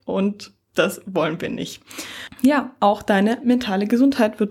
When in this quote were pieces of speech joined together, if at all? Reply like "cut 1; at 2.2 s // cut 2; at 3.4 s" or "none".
none